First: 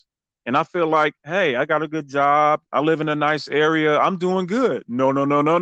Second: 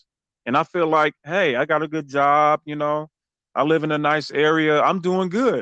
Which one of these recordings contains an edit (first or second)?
first